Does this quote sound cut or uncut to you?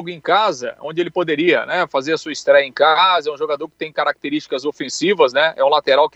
uncut